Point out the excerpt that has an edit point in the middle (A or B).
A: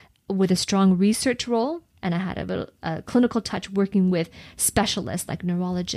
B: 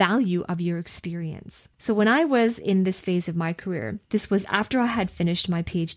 B